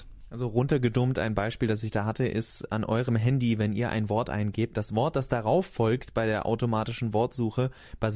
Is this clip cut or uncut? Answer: uncut